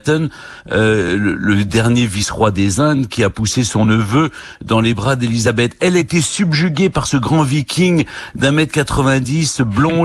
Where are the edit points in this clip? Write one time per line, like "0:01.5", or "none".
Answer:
none